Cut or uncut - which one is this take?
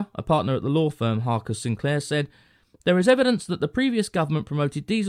uncut